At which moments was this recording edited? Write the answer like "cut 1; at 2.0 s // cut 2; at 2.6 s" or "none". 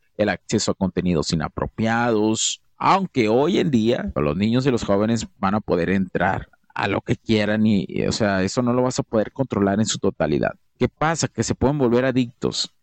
cut 1; at 4.2 s // cut 2; at 10.7 s